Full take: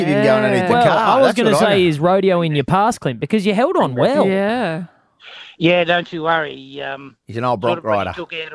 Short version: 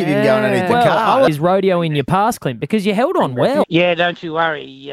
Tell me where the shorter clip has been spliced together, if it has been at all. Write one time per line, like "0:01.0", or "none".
0:01.3
0:03.6